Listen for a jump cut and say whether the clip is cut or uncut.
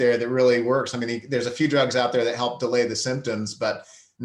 uncut